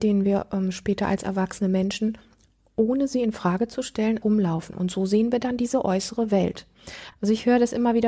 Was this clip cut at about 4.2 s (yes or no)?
yes